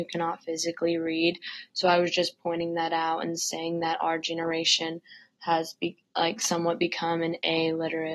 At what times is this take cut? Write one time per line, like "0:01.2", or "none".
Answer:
none

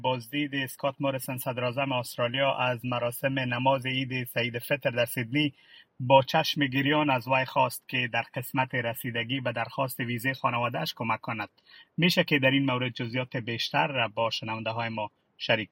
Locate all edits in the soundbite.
none

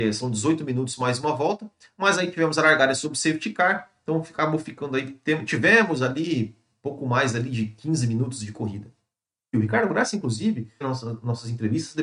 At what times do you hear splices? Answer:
0:09.5
0:10.8

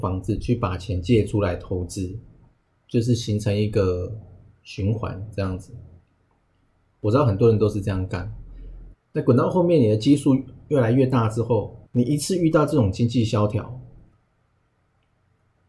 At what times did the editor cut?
0:08.9
0:11.9

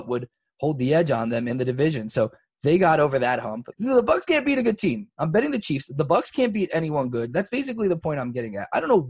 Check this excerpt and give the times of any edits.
0:03.7

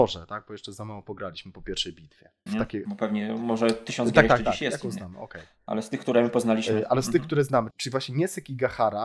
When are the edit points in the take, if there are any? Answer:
0:02.5
0:07.7

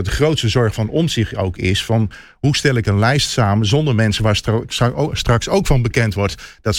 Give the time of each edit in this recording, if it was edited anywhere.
none

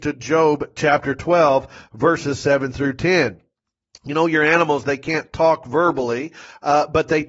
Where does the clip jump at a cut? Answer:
none

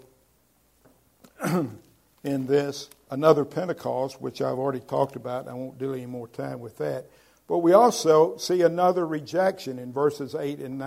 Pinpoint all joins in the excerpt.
0:03.1

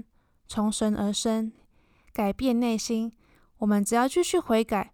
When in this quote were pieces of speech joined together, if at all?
none

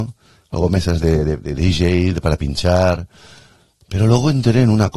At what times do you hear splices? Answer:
0:01.4

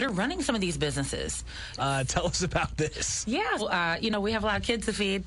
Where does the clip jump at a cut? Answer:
0:01.8
0:03.6

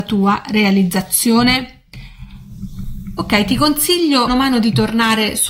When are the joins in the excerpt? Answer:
0:04.3

